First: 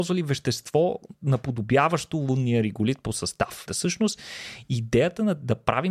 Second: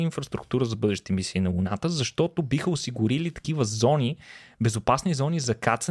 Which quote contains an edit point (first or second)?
first